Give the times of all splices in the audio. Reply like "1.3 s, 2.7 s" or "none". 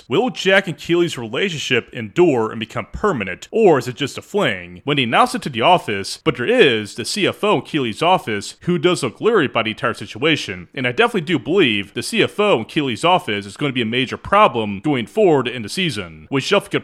4.8 s, 6.2 s